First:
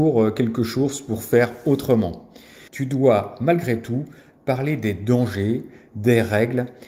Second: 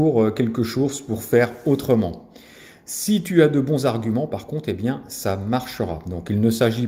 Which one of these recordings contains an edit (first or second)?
first